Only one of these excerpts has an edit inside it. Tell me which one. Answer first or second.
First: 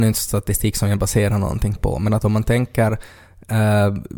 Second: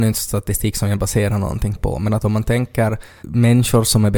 second